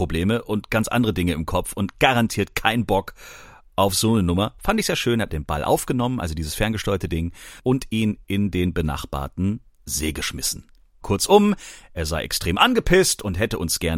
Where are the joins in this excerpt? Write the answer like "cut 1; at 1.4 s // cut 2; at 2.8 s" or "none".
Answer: cut 1; at 5.3 s // cut 2; at 11.0 s